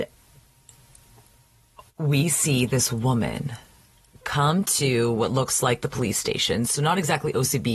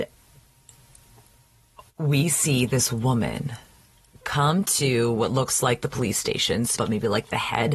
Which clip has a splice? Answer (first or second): second